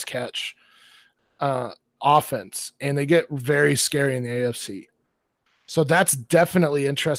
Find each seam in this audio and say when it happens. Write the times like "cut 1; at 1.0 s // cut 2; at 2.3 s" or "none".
cut 1; at 2.0 s